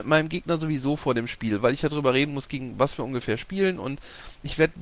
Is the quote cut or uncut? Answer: uncut